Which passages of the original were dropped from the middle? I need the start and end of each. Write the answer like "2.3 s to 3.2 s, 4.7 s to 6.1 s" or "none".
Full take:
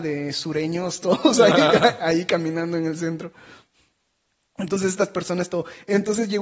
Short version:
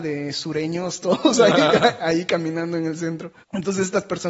3.4 s to 4.5 s